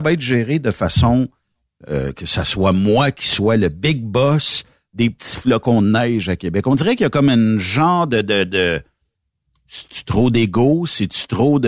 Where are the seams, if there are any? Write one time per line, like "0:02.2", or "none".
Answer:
none